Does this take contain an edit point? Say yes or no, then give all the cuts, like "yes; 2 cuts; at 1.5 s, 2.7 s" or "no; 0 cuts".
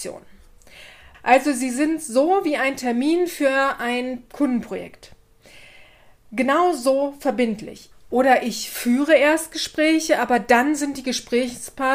yes; 2 cuts; at 1.1 s, 7.9 s